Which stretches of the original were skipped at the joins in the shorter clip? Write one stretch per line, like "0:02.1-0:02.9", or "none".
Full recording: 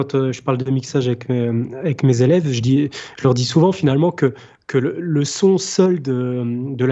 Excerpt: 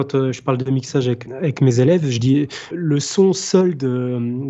0:01.3-0:01.7
0:03.1-0:05.0